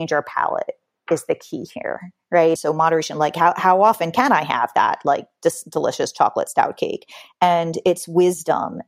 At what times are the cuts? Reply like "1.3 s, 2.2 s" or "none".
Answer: 2.6 s